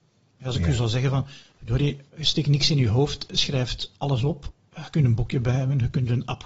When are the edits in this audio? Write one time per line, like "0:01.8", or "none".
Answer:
none